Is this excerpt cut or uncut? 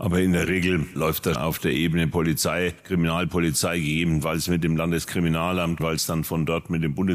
cut